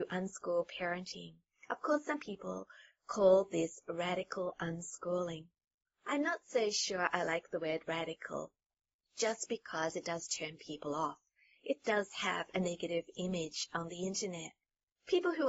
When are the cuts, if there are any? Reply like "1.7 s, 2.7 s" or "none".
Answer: none